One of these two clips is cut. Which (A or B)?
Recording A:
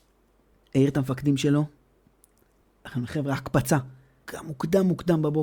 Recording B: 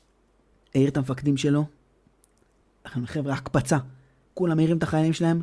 A